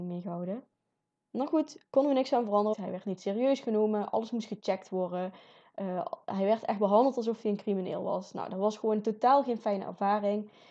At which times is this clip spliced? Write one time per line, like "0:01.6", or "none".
0:02.7

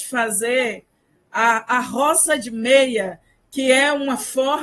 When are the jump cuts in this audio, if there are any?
none

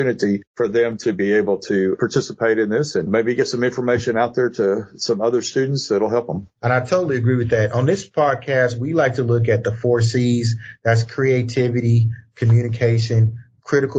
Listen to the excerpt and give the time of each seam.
none

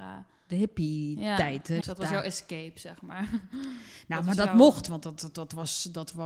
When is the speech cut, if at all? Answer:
0:01.8
0:05.2

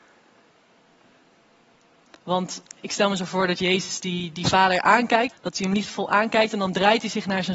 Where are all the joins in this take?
0:05.3

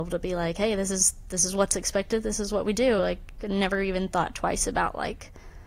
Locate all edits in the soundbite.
none

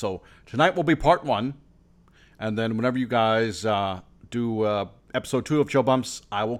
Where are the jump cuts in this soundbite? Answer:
none

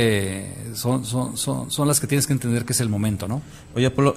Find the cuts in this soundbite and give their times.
none

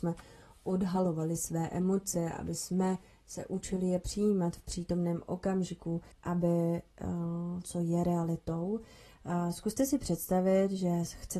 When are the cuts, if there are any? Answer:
0:06.1
0:07.6

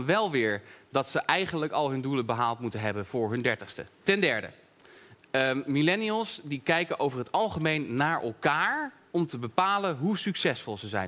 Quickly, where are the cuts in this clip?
0:04.0

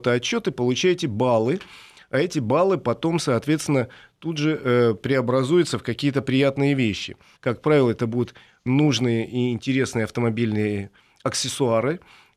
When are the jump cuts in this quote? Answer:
0:07.4
0:08.7

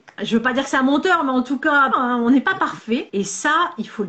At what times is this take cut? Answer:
0:01.9
0:03.1

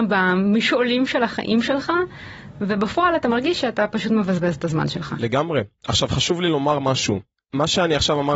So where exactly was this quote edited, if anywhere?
none

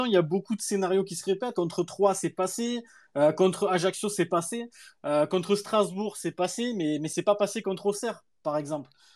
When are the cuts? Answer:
none

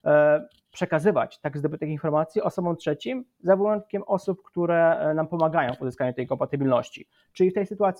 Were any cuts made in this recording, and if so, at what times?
none

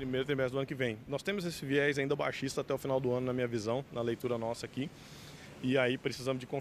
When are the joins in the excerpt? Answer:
none

